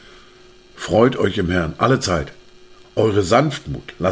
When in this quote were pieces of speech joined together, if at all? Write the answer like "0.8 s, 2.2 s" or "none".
2.8 s